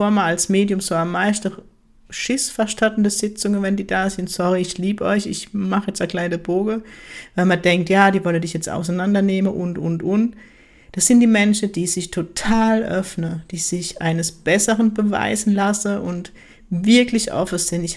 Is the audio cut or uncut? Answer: uncut